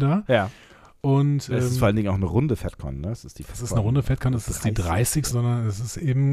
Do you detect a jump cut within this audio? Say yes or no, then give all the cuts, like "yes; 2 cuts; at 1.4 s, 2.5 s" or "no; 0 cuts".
yes; 2 cuts; at 1.5 s, 5.3 s